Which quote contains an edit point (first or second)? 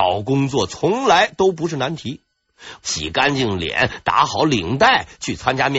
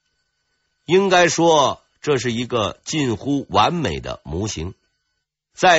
first